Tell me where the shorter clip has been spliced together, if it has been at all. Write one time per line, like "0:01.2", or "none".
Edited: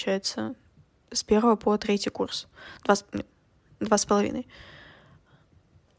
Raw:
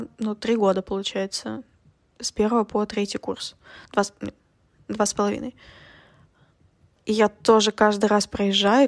none